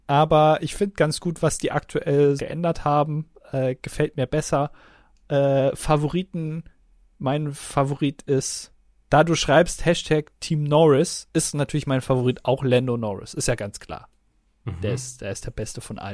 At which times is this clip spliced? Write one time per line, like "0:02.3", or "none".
0:02.4